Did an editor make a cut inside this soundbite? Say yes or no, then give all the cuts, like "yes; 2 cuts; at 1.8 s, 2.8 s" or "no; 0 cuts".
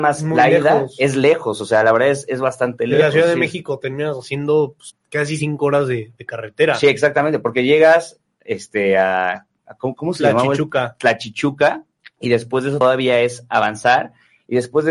no; 0 cuts